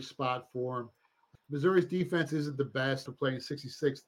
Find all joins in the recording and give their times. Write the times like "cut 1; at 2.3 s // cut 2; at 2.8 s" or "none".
cut 1; at 1.3 s // cut 2; at 3.1 s